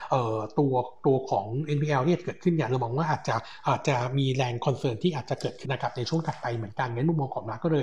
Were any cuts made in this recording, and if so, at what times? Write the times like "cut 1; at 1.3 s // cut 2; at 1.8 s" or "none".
cut 1; at 5.6 s